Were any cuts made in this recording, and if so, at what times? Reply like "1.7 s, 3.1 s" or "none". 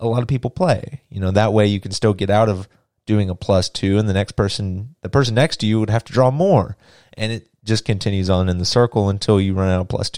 none